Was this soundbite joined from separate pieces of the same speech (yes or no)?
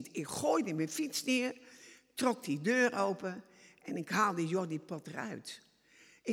no